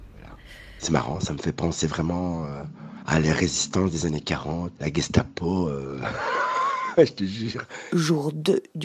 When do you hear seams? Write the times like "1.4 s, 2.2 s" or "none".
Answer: 4.8 s